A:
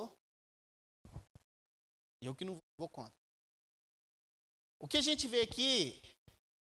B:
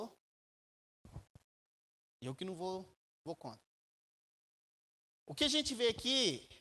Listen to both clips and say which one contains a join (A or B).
A